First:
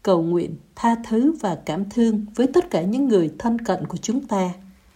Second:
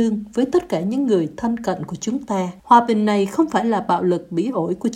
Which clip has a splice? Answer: second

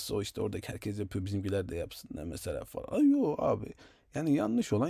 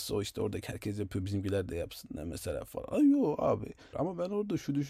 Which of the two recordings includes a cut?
second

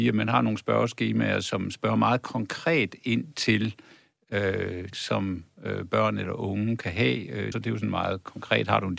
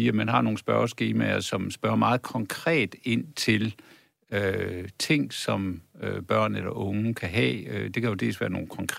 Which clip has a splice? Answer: first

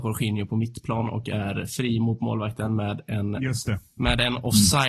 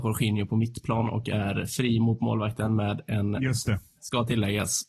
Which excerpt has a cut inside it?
second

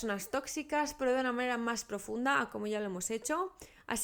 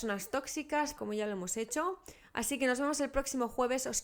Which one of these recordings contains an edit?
second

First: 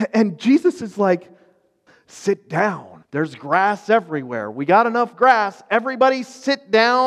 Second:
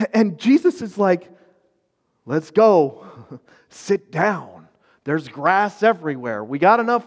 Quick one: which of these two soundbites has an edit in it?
first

